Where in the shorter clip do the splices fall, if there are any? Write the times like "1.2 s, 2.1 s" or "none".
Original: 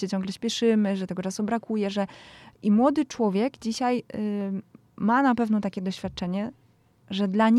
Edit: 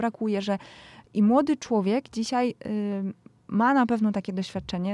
none